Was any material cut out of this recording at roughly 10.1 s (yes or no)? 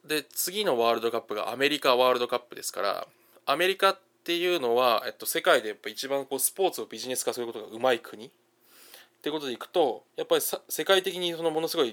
yes